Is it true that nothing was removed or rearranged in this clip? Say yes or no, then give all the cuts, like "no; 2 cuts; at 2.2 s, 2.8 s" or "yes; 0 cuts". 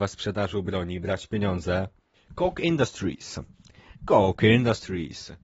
no; 1 cut; at 2.1 s